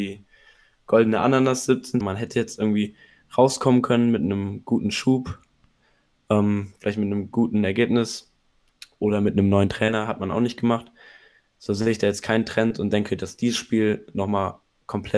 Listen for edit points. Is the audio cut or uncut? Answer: cut